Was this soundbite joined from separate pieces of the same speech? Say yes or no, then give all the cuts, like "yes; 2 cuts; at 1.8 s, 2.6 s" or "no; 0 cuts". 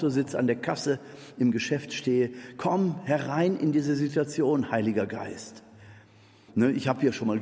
yes; 1 cut; at 6.5 s